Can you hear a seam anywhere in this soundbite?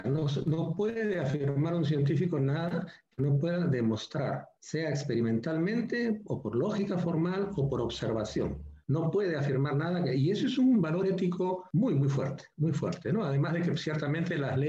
no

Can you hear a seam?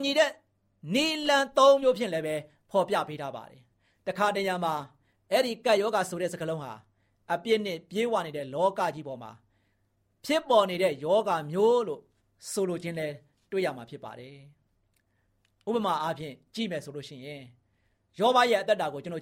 no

